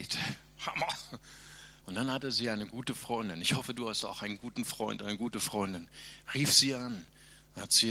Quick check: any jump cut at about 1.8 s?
yes; 1 cut; at 1.8 s

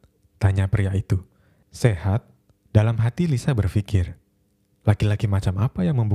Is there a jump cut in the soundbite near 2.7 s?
yes; 1 cut; at 2.7 s

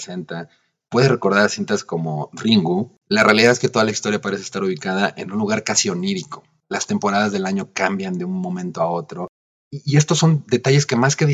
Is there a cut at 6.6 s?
yes; 1 cut; at 6.6 s

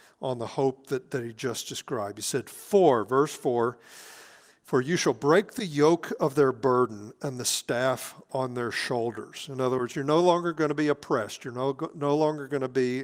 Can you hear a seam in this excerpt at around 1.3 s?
no; 0 cuts

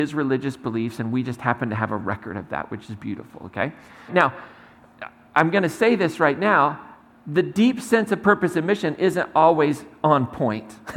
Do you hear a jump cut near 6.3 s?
no; 1 cut; at 4.1 s

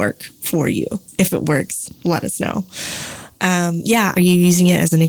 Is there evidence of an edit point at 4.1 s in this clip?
yes; 1 cut; at 4.1 s

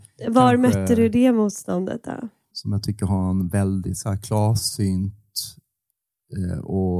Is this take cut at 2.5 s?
yes; 1 cut; at 2.5 s

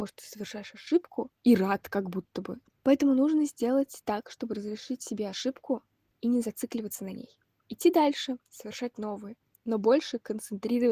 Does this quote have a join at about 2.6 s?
yes; 1 cut; at 2.6 s

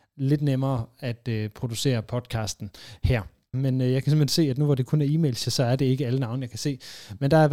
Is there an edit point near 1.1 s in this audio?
no; 2 cuts; at 3.5 s, 5.4 s

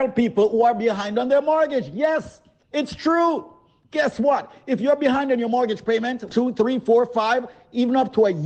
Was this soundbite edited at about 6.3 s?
yes; 1 cut; at 6.3 s

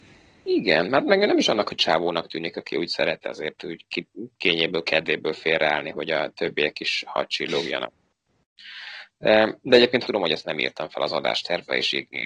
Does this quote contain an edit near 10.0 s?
yes; 1 cut; at 10.0 s

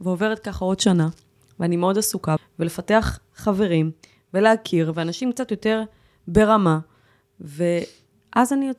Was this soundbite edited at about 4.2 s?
no; 1 cut; at 2.4 s

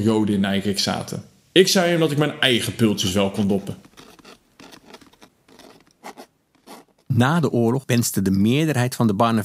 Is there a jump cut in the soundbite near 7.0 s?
no; 1 cut; at 1.4 s

